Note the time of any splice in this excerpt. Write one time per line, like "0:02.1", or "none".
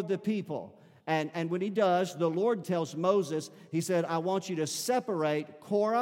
0:02.6